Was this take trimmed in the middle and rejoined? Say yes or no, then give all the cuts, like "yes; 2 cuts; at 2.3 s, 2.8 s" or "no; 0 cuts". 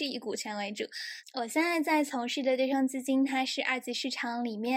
yes; 1 cut; at 1.2 s